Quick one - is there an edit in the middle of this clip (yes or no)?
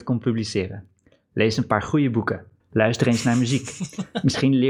yes